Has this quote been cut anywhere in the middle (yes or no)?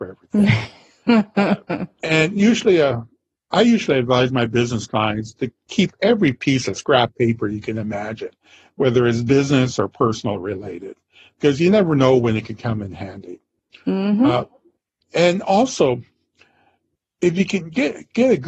no